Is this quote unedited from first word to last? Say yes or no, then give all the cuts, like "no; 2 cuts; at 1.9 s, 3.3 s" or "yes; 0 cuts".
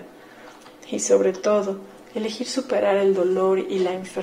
yes; 0 cuts